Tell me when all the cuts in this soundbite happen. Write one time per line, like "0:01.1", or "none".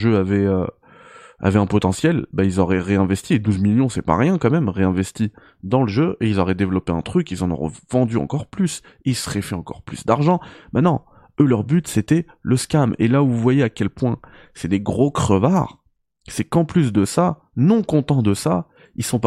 none